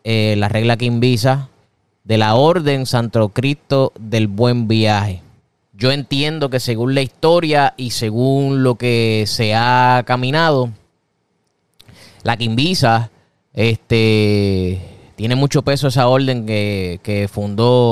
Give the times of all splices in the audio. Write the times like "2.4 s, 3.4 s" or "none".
5.6 s